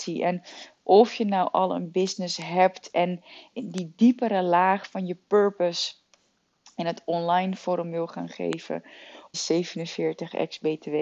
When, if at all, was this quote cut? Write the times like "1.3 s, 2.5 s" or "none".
3.5 s, 9.3 s